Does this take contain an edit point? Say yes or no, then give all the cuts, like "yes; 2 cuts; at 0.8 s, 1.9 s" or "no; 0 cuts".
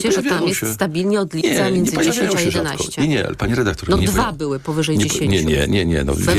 no; 0 cuts